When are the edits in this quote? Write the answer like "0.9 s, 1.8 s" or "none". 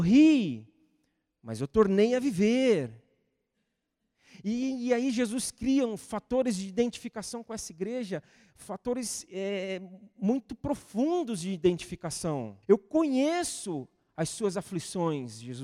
12.6 s